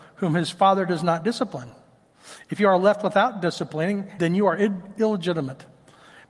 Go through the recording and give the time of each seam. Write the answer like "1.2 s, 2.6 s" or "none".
4.2 s